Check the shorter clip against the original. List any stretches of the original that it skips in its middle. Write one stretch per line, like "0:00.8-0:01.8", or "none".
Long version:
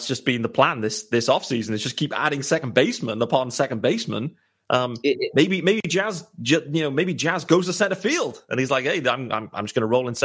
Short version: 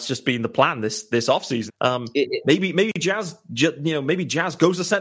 0:01.7-0:04.6